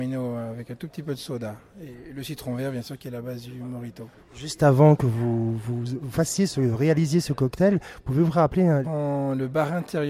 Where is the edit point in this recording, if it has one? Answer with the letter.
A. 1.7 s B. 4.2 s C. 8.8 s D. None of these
C